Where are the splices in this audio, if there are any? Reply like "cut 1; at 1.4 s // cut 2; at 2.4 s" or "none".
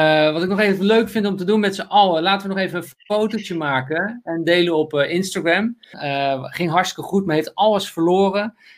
cut 1; at 5.9 s